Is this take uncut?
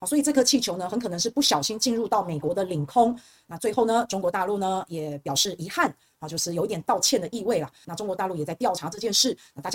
no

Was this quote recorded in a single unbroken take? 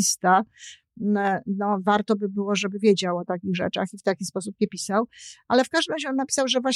yes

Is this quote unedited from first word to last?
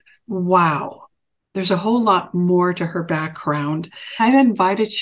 yes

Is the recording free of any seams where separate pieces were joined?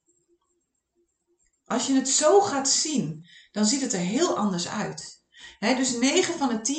yes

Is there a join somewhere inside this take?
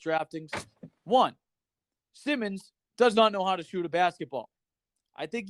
no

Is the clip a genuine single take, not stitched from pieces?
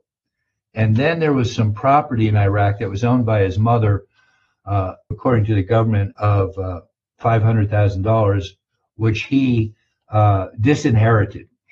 no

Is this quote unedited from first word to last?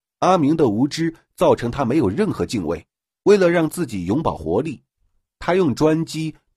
no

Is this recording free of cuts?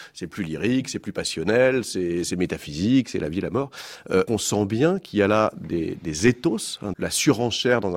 no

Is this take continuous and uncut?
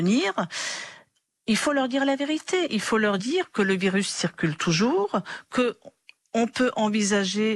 yes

